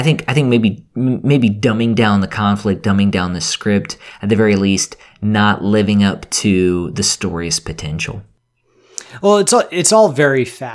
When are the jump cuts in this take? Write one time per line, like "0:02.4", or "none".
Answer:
none